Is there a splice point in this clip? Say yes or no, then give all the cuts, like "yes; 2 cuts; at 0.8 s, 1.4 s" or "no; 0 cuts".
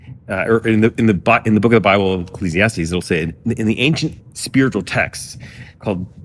no; 0 cuts